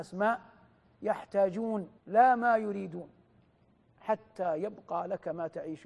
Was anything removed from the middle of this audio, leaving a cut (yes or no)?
yes